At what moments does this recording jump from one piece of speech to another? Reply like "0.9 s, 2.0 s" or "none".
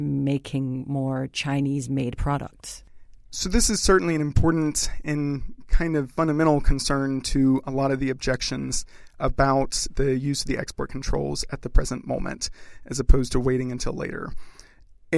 none